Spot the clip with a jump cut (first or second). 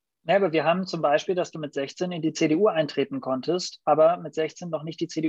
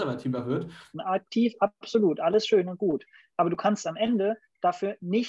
second